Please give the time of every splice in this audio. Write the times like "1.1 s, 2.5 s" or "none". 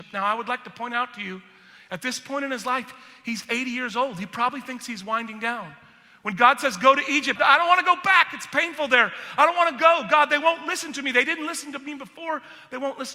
7.4 s